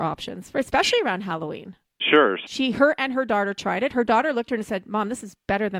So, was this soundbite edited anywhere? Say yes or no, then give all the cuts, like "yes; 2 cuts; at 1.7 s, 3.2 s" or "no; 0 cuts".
yes; 1 cut; at 2.5 s